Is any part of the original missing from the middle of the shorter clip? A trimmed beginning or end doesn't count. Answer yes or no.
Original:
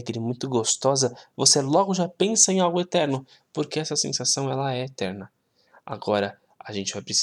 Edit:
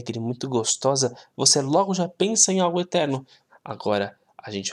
yes